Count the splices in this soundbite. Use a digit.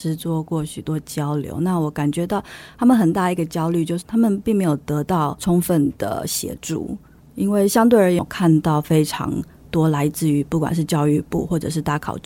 1